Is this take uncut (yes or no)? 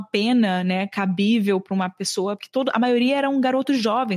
yes